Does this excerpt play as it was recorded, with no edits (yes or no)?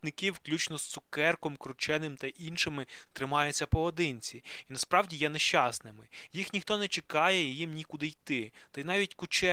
yes